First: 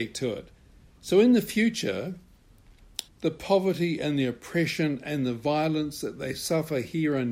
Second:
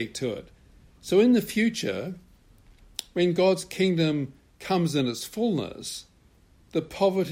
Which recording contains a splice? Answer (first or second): first